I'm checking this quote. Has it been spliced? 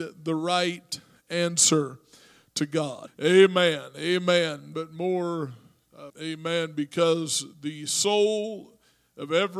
yes; 3 cuts; at 3.1 s, 4.7 s, 6.1 s

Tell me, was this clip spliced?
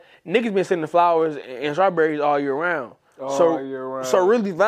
no; 0 cuts

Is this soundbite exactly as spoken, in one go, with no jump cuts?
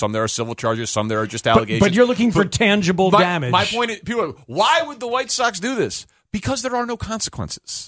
yes; 0 cuts

